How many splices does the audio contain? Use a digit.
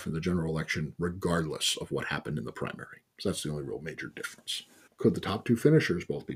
1